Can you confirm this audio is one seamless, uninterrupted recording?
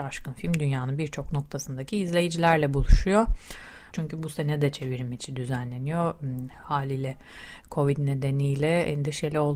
no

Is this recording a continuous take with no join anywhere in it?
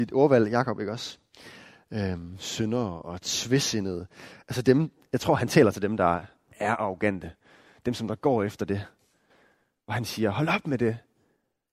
yes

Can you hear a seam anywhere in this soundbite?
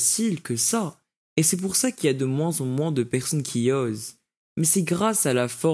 no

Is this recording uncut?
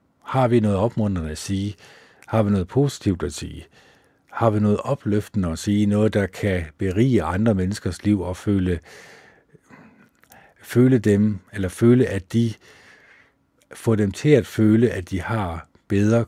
yes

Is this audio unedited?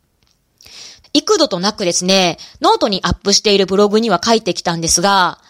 no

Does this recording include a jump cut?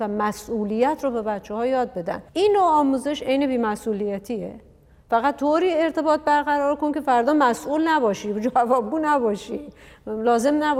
yes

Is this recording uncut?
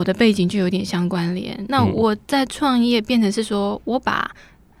yes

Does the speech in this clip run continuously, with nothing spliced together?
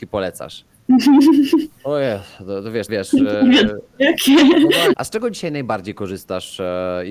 no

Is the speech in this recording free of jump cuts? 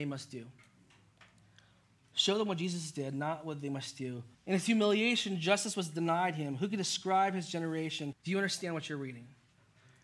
no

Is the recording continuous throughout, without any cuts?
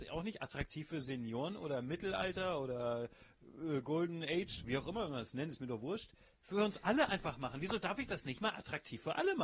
yes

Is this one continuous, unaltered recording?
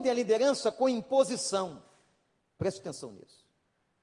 no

